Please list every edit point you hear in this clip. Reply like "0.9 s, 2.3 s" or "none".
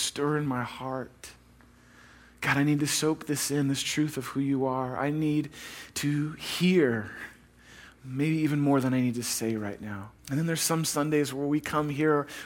10.2 s